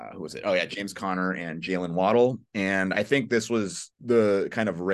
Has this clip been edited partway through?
yes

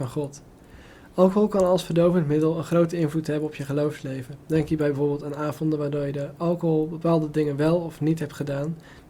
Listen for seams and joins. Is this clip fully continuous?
yes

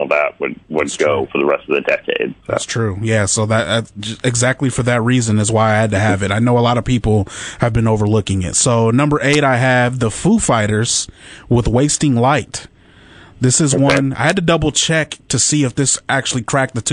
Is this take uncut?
yes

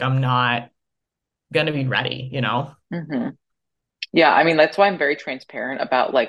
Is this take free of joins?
yes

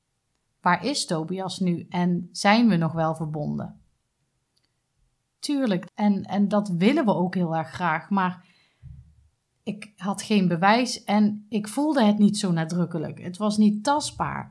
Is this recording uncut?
no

